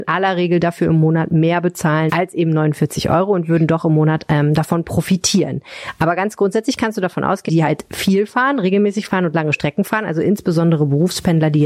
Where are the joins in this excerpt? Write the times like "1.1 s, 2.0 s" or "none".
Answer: 2.1 s, 7.5 s